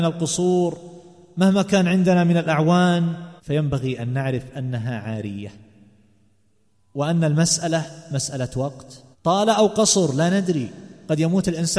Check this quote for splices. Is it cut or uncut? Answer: cut